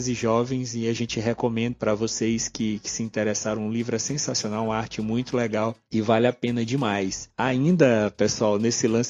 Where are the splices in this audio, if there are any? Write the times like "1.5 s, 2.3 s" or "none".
none